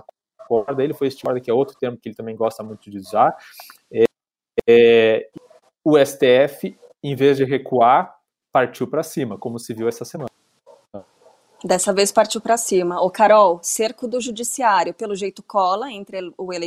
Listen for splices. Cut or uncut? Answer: uncut